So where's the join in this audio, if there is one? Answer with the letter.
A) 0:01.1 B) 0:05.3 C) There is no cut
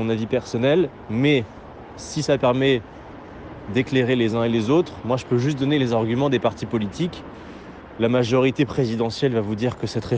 C